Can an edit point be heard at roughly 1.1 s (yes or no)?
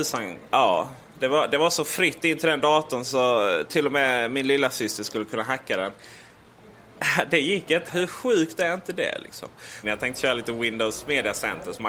no